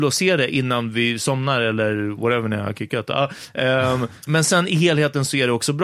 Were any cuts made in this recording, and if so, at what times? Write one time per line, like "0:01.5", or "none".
0:04.3